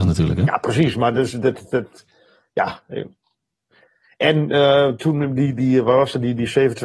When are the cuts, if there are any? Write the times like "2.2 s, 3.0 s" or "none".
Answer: none